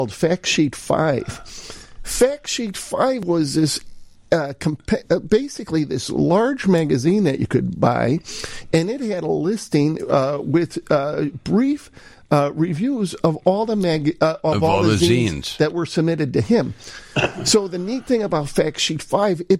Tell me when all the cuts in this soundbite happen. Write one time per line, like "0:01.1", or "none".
none

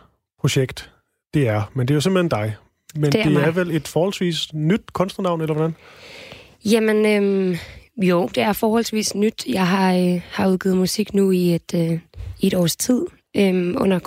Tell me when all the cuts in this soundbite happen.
none

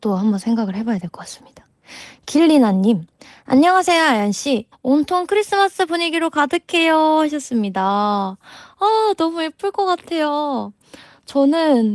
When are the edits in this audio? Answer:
0:04.7

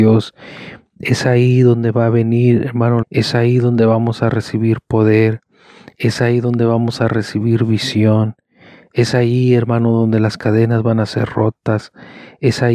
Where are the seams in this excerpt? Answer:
0:03.0

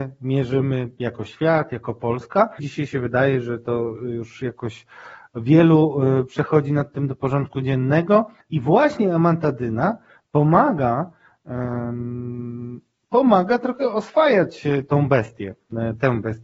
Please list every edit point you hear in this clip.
0:02.6
0:08.4

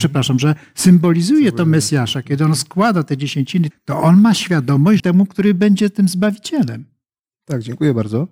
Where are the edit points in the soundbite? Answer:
0:03.7
0:05.0

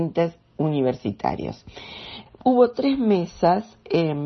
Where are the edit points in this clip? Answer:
0:02.3

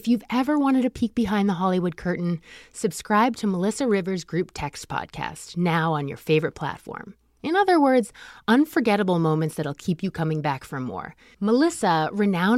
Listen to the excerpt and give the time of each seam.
0:07.4
0:11.3

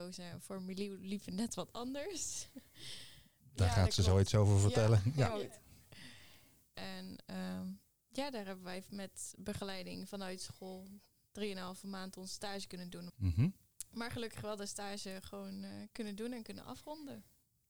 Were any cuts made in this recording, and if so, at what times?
0:06.7
0:13.1

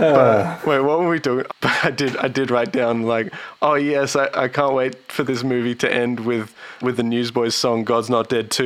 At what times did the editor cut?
0:01.5
0:06.8

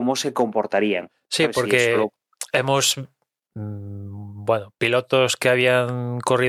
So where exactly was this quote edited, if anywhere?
none

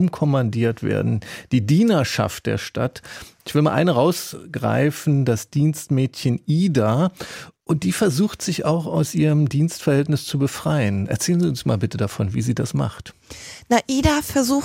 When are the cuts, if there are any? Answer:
none

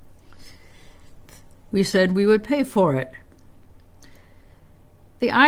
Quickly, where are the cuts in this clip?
0:01.6

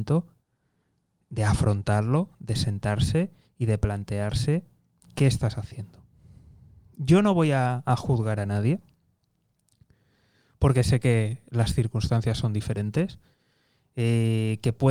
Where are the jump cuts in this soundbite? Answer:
none

